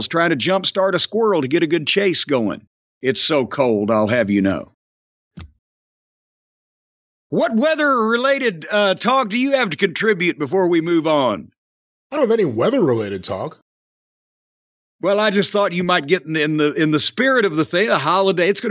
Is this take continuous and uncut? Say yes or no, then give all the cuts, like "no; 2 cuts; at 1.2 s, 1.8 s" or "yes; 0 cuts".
yes; 0 cuts